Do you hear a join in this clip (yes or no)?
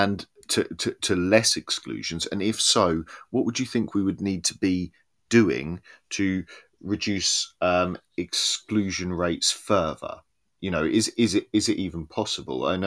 no